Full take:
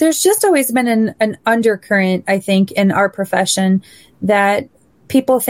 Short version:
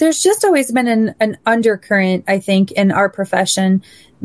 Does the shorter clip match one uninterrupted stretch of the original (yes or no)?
yes